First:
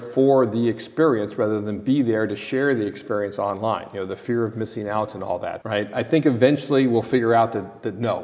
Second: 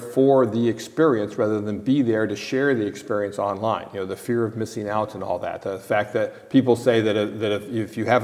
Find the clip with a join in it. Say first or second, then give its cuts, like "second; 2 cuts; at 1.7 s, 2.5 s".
first; 1 cut; at 5.6 s